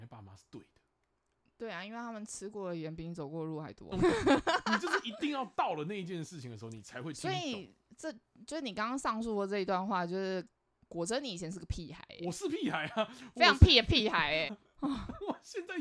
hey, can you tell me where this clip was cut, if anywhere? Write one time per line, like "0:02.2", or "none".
0:03.9
0:14.5